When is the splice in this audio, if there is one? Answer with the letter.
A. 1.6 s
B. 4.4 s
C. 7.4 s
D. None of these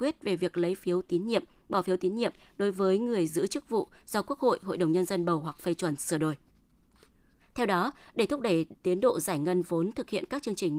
C